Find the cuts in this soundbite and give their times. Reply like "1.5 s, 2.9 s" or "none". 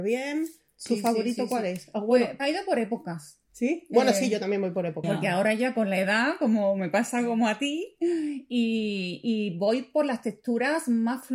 2.4 s, 5.0 s